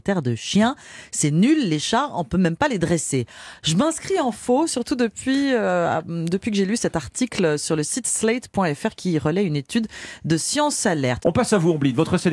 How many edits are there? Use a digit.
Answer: 1